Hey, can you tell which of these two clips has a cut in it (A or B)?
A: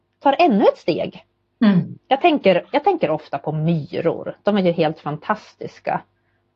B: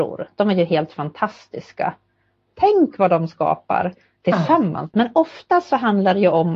B